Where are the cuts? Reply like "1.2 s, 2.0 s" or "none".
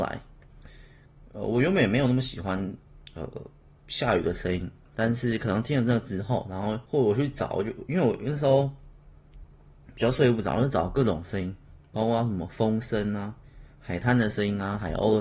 6.9 s